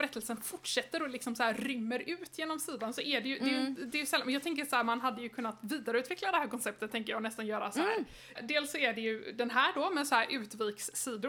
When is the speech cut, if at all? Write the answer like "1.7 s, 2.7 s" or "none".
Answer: 8.4 s